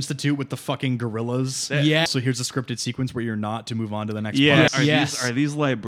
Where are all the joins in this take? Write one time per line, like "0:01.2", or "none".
0:02.1
0:04.7